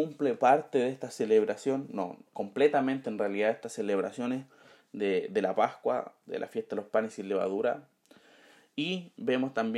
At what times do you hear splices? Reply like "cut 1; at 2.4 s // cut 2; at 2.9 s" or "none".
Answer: none